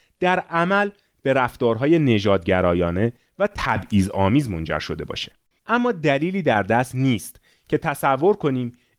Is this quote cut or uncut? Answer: cut